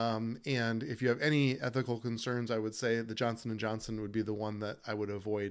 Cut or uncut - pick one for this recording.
uncut